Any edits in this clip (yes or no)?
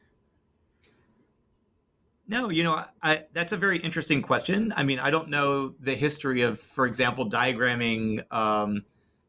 no